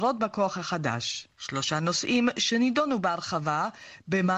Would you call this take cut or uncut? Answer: cut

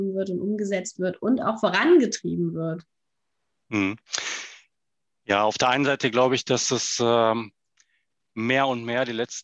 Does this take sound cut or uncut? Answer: uncut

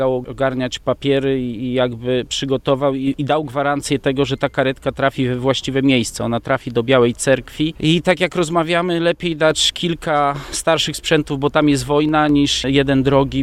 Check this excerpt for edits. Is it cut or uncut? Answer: uncut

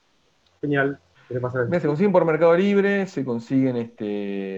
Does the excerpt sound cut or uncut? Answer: cut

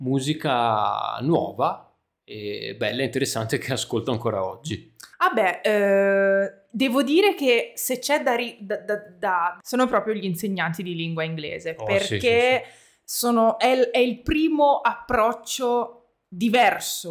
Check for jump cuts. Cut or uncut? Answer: cut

